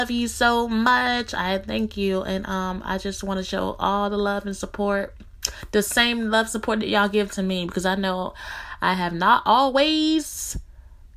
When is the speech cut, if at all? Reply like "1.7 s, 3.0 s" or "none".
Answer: none